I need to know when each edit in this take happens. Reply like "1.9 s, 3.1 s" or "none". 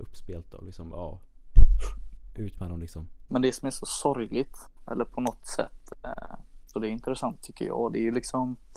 3.3 s, 6.7 s